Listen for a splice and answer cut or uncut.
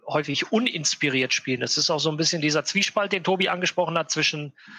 uncut